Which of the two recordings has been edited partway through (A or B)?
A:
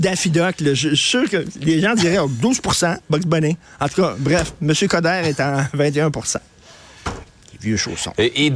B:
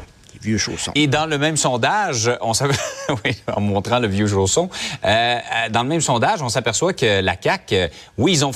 B